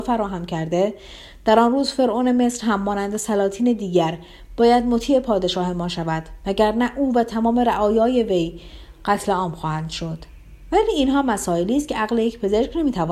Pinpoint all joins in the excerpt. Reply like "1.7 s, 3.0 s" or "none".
none